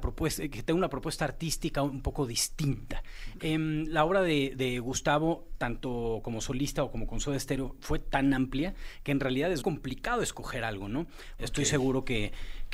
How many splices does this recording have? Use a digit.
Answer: 2